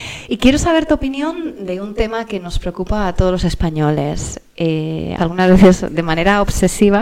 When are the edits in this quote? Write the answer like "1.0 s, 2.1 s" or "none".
5.2 s